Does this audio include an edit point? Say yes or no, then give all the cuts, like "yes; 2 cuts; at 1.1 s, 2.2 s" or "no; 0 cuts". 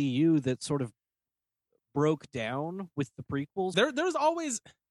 yes; 1 cut; at 3.7 s